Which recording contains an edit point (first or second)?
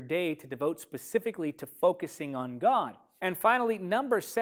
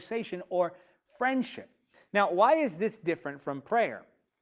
first